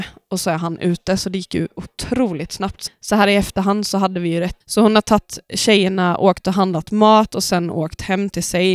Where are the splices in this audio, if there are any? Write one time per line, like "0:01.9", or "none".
0:02.9
0:04.6